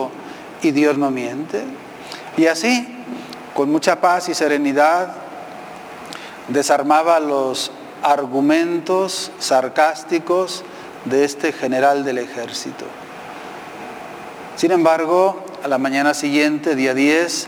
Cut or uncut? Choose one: cut